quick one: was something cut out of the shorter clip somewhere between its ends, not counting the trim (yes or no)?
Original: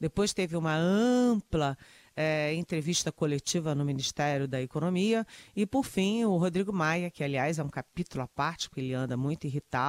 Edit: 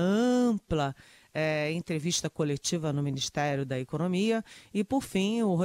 no